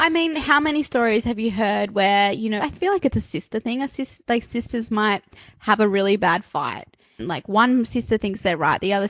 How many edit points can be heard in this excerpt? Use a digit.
2